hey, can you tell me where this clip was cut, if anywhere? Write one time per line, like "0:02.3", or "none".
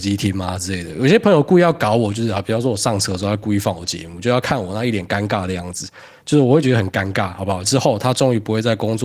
0:07.6